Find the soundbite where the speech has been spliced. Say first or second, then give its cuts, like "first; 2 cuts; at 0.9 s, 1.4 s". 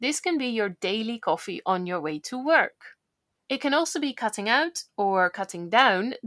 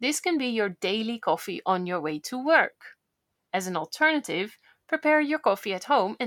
first; 1 cut; at 3.4 s